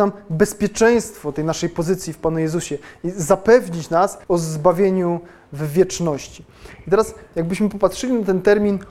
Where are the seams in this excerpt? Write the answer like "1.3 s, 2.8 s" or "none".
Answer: 4.2 s